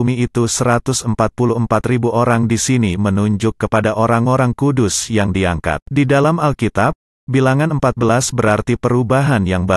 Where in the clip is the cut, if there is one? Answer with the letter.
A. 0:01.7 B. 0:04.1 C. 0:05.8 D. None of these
C